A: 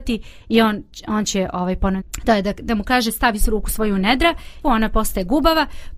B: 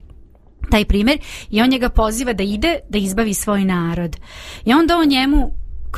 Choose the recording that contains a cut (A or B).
A